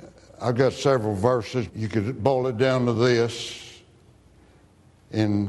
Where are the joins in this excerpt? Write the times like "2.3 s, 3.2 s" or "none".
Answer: 1.7 s